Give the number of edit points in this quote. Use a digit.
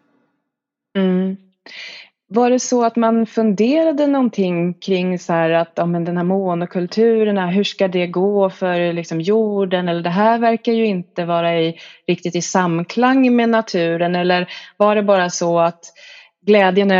0